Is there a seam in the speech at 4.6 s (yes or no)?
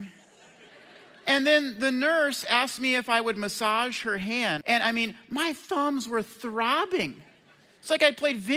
yes